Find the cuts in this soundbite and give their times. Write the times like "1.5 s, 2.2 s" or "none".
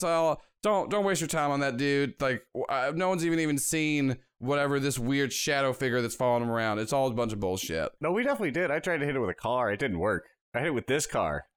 none